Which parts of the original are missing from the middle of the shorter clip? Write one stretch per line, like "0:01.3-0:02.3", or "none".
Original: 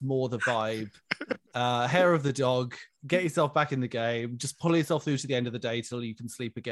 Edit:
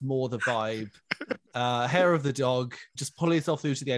0:03.0-0:04.4